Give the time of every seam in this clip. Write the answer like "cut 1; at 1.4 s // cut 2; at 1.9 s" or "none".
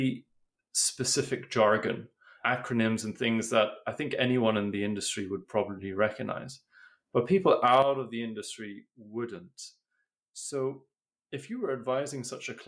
none